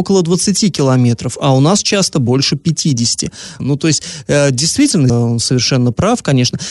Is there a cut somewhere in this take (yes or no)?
yes